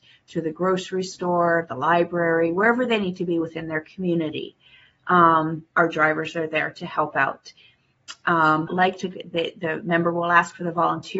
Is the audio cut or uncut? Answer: cut